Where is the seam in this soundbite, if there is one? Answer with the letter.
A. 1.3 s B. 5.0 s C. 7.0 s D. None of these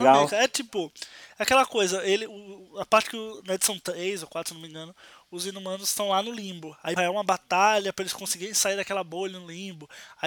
C